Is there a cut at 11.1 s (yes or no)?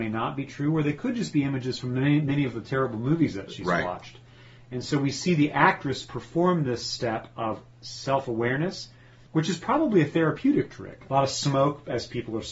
yes